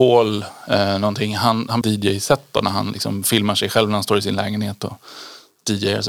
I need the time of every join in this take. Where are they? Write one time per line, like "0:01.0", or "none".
0:01.8